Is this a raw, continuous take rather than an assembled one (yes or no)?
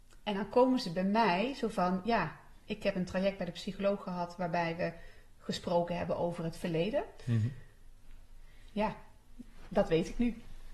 yes